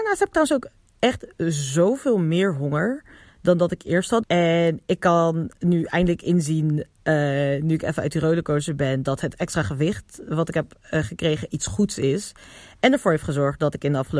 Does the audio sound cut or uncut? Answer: cut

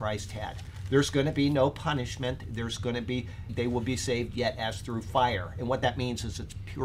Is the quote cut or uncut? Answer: cut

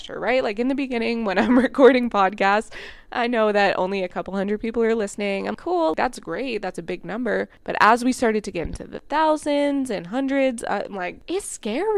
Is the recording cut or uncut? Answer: cut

